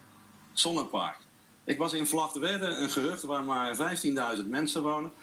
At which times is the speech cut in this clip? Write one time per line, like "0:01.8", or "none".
none